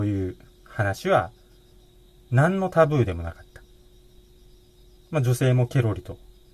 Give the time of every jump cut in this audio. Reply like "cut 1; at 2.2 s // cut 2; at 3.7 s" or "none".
none